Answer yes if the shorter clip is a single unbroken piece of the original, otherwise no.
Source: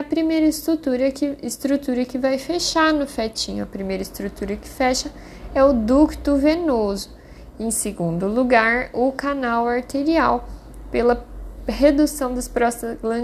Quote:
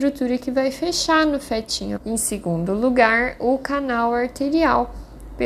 no